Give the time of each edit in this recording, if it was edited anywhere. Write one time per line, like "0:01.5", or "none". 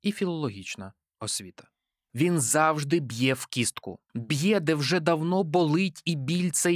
0:02.1
0:04.1